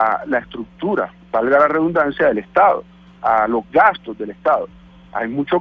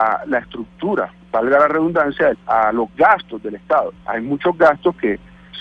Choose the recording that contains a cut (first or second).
second